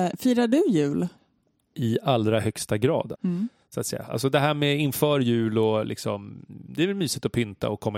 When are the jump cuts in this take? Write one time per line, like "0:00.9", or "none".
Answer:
0:03.1